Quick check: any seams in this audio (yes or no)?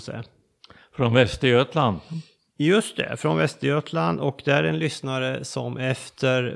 no